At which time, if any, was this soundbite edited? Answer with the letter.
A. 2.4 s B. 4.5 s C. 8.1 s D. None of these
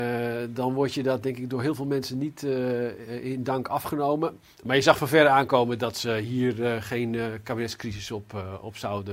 B